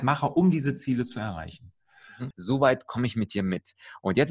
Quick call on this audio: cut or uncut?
cut